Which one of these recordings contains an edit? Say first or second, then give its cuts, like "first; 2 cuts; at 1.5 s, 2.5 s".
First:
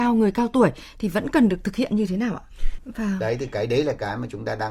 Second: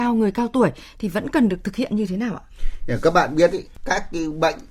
first; 1 cut; at 2.8 s